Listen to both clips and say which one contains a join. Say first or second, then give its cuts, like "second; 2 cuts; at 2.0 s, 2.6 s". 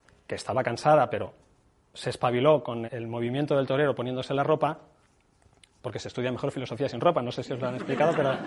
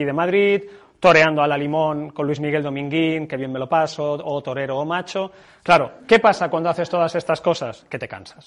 first; 1 cut; at 2.9 s